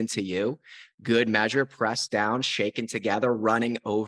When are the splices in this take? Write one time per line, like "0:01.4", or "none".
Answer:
none